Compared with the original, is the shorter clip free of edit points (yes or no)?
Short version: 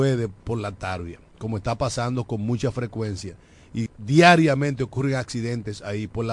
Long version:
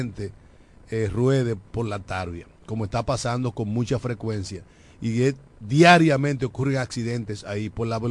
no